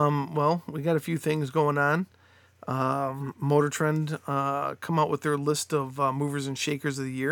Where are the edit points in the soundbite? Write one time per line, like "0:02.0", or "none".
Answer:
none